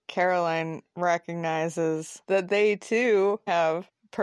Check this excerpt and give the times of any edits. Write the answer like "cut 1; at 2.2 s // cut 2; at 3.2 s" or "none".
cut 1; at 2.2 s